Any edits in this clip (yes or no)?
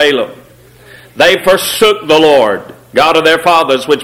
no